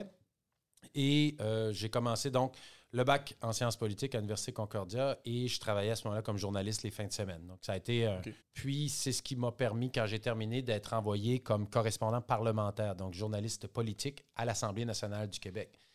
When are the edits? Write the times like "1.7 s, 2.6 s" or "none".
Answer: 8.4 s